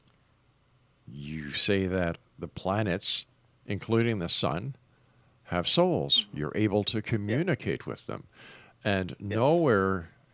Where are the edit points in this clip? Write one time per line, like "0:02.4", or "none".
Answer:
none